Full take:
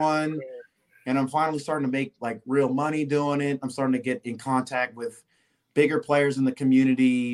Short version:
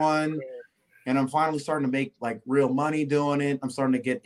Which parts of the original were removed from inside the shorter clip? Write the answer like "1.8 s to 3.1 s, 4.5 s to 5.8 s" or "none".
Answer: none